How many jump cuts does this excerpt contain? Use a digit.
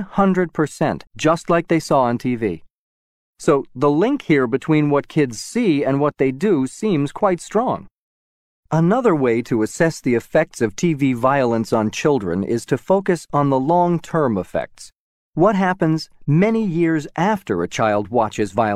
1